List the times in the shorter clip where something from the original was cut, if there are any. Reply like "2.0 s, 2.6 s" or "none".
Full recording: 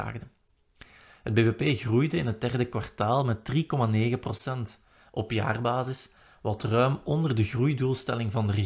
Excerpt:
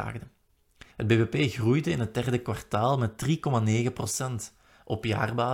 0.9 s